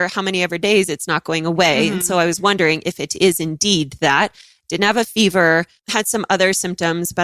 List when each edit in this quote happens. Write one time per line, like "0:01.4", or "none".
none